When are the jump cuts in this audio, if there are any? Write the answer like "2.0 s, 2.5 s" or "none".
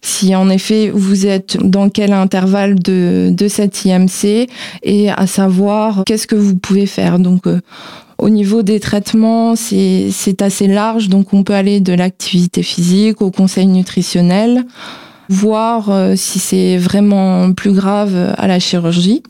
none